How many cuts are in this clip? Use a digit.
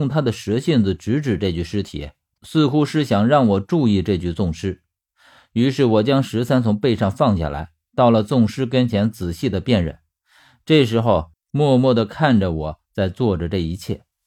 1